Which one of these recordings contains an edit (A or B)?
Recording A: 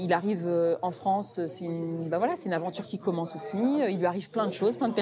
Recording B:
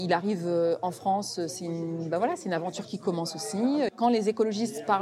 B